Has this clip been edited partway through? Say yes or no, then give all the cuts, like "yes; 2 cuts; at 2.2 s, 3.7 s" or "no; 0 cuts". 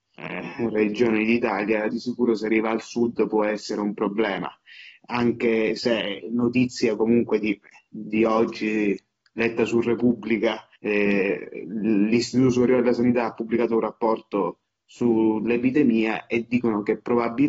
yes; 1 cut; at 10.8 s